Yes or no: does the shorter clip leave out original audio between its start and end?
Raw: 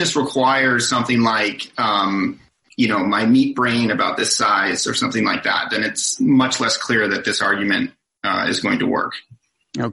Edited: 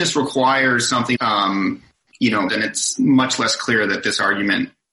yes